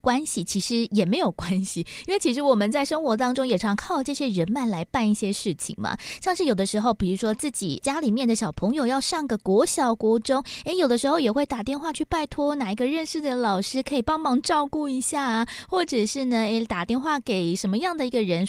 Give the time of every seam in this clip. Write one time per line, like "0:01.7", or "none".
0:03.6